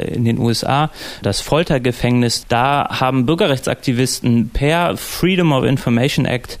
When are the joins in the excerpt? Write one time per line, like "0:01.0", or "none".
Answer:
0:01.2
0:02.4